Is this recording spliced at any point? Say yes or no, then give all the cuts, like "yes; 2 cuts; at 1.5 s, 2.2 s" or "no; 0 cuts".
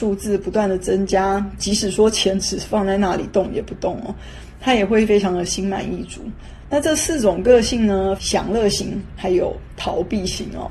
yes; 3 cuts; at 6.7 s, 8.2 s, 9.2 s